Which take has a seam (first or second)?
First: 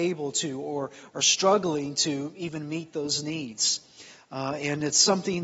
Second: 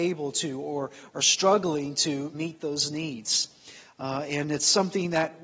second